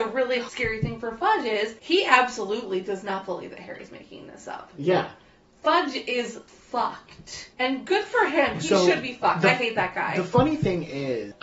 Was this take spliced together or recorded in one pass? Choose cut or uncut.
uncut